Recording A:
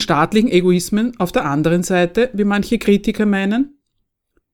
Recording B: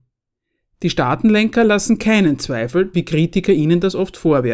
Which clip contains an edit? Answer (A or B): B